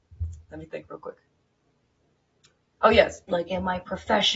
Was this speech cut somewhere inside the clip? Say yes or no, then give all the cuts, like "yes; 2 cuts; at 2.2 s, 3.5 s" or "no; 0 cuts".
yes; 1 cut; at 3.3 s